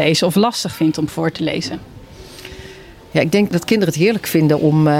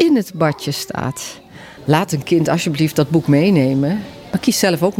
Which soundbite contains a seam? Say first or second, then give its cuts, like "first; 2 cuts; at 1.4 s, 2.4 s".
second; 1 cut; at 1.8 s